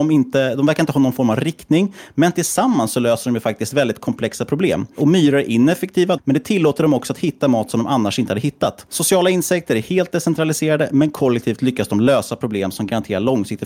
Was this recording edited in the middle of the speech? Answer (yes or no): yes